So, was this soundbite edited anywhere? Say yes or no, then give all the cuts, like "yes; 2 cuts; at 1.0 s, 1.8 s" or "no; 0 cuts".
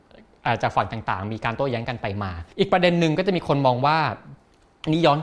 yes; 1 cut; at 2.5 s